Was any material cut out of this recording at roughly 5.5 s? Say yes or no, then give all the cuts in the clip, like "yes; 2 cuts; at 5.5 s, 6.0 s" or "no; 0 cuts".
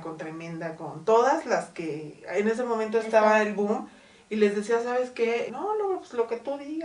yes; 1 cut; at 5.5 s